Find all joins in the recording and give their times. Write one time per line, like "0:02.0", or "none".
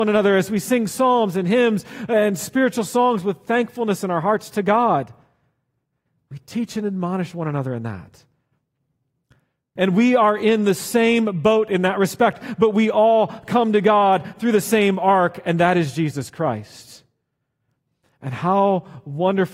0:09.8